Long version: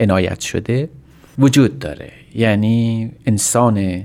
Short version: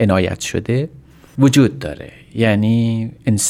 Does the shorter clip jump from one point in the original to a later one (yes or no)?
no